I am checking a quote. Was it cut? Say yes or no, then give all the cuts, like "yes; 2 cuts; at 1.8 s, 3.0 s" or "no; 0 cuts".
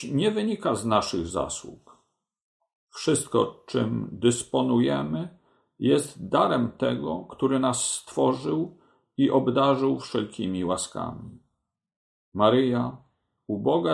no; 0 cuts